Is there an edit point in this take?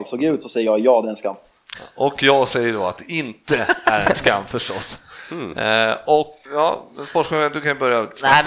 yes; 1 cut; at 6.5 s

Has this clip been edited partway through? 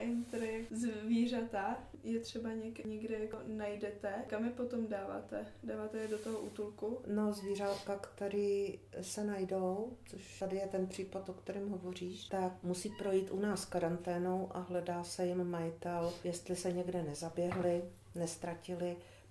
no; 0 cuts

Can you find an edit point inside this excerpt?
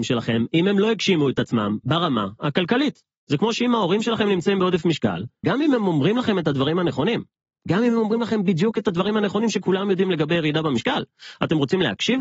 yes; 1 cut; at 5.4 s

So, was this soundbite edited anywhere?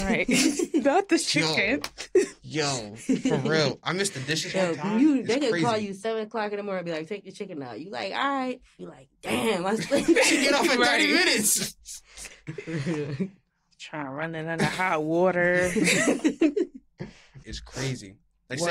yes; 2 cuts; at 8.8 s, 17.4 s

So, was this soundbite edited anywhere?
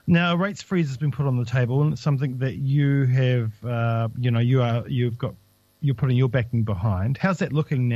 no; 0 cuts

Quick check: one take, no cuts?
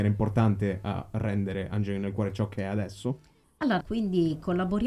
no; 1 cut; at 3.8 s

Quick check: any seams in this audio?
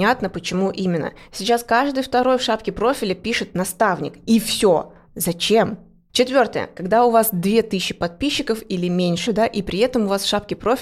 yes; 2 cuts; at 6.1 s, 9.3 s

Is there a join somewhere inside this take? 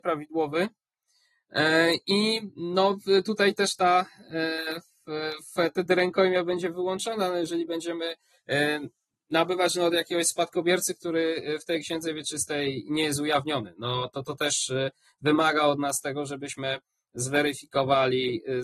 no; 0 cuts

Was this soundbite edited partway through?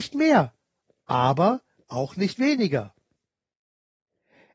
no; 0 cuts

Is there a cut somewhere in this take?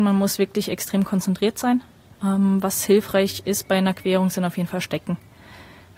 no; 0 cuts

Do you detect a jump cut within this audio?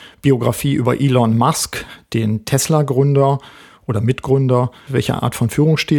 yes; 1 cut; at 4.9 s

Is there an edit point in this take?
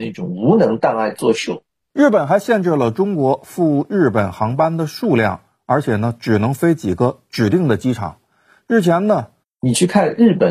yes; 1 cut; at 9.4 s

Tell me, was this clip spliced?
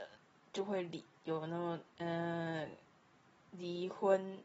no; 0 cuts

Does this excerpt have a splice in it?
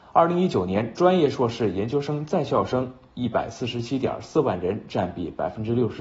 no; 0 cuts

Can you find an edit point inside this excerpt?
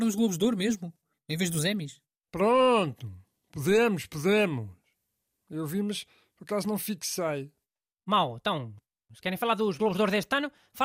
yes; 1 cut; at 5.4 s

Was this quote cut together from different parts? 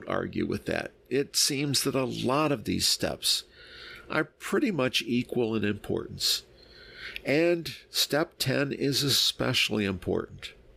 no; 0 cuts

